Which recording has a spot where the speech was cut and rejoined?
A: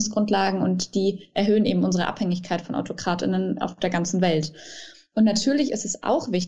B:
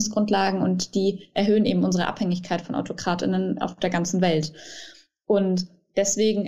A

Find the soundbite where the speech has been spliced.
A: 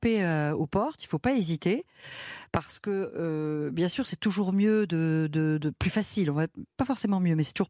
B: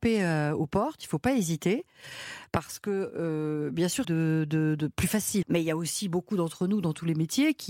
B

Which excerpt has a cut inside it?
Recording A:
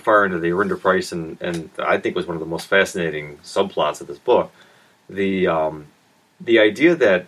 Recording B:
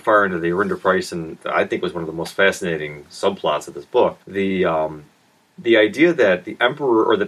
B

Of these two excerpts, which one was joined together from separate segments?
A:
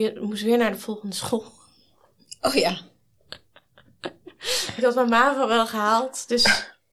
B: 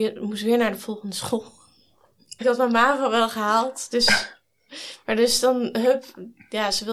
B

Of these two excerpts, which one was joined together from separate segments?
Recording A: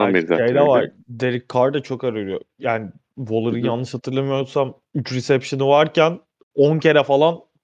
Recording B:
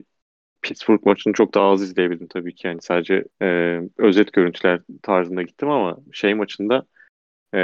B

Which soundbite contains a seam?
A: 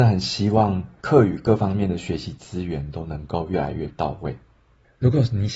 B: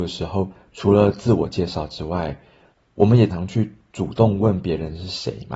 B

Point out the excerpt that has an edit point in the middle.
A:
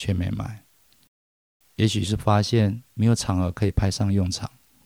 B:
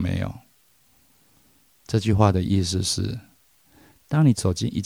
A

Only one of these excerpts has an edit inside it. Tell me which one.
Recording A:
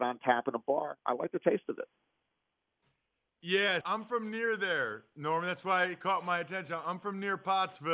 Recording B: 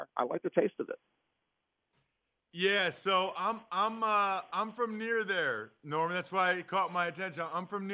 A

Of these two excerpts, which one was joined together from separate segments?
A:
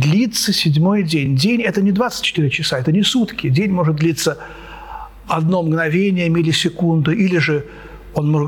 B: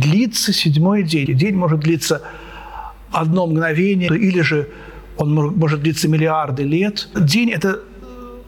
B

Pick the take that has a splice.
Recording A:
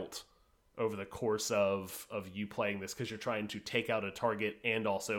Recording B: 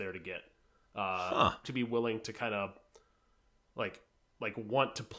B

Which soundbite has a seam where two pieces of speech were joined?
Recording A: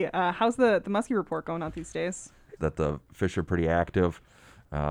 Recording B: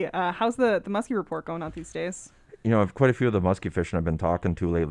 A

